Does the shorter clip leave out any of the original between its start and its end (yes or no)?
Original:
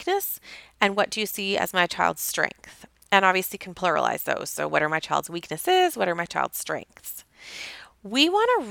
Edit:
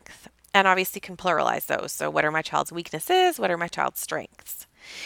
no